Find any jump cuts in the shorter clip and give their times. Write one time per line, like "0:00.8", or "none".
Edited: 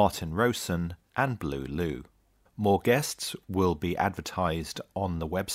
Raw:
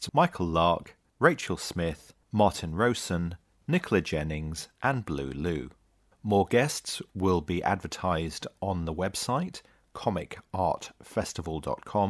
0:01.1